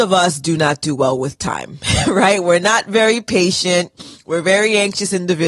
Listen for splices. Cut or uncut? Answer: uncut